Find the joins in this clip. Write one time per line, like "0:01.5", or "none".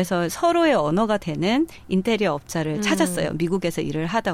none